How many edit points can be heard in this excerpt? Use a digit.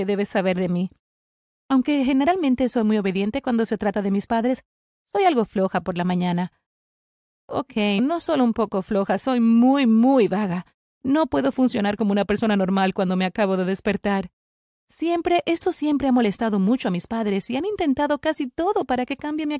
2